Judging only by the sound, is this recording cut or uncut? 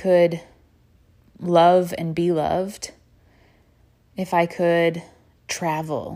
uncut